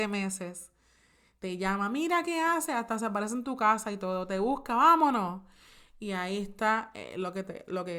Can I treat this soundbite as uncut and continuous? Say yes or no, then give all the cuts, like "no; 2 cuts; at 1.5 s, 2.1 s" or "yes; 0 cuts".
yes; 0 cuts